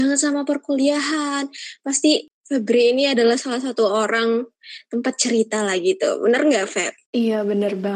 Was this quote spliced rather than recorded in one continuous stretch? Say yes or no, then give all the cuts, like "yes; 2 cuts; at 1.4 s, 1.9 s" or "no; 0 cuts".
no; 0 cuts